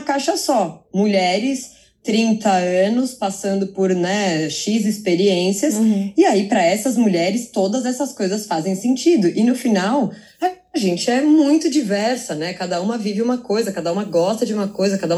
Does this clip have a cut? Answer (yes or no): no